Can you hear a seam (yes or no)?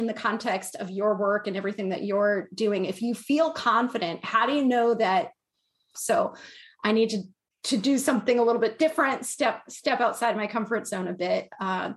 yes